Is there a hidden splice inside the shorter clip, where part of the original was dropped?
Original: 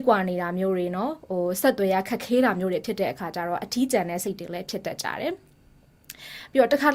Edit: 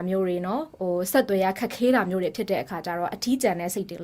no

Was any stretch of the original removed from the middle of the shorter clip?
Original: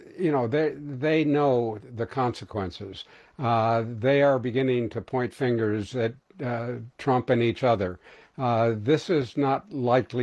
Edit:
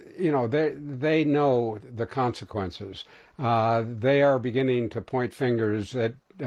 no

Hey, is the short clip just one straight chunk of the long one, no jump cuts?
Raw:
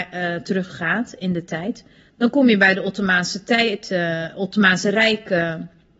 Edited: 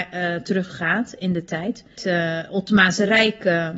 no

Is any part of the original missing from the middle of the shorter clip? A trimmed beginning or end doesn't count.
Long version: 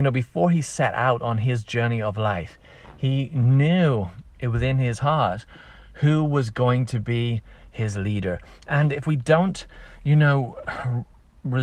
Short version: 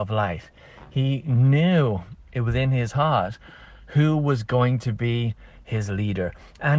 no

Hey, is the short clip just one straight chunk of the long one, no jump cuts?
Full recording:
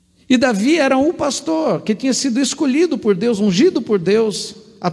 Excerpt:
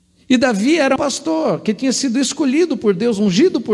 no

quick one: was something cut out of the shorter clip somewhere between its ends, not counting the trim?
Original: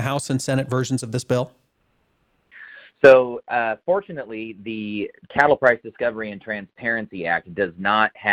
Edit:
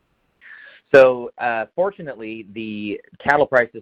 no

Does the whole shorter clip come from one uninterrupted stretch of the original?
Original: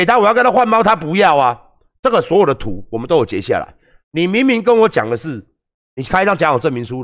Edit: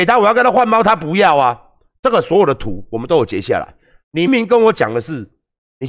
no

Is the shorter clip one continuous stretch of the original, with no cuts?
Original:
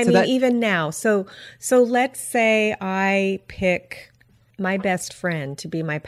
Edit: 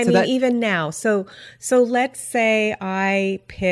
yes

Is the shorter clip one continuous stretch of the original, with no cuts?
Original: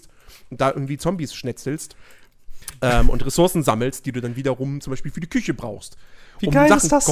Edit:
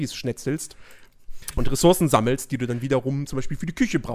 no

